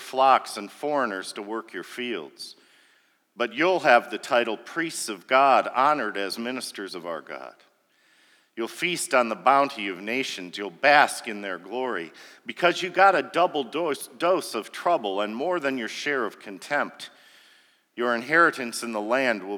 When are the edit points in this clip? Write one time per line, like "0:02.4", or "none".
none